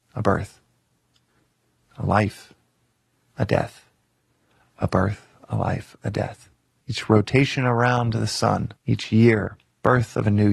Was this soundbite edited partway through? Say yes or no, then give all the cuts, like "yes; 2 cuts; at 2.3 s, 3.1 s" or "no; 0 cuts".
yes; 2 cuts; at 6.8 s, 8.8 s